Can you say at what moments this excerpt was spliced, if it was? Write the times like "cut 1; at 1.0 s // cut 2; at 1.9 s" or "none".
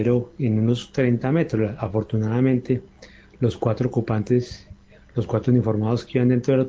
none